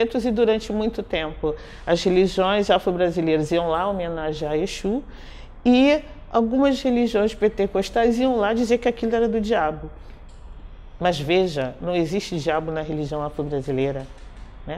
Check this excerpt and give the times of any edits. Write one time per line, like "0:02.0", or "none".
none